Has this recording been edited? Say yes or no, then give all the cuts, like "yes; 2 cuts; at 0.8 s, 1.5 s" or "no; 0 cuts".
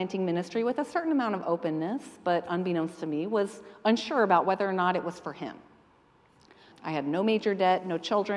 yes; 1 cut; at 6.7 s